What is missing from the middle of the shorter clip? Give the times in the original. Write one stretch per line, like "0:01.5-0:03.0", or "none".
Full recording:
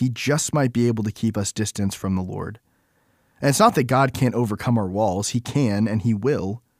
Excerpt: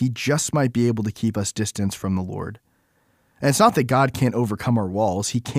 none